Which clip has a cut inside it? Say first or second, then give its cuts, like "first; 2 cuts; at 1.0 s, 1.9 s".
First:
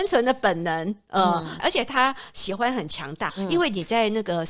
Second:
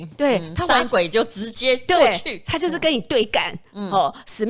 first; 2 cuts; at 1.6 s, 3.3 s